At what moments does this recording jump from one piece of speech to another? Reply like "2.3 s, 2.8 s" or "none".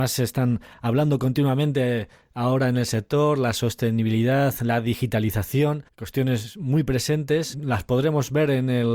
5.9 s, 7.5 s